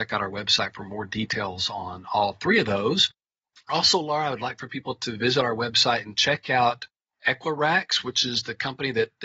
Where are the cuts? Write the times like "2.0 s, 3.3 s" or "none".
none